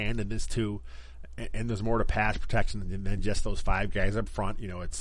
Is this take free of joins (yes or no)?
yes